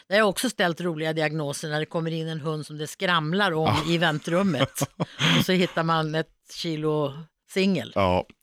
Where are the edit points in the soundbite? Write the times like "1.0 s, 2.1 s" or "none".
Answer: none